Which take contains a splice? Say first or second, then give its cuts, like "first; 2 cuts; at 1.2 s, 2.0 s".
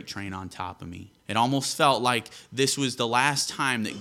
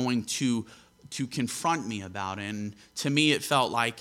first; 1 cut; at 1.2 s